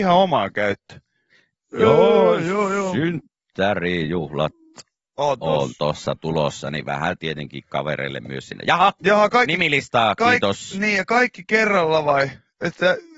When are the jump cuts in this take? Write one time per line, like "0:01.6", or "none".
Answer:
none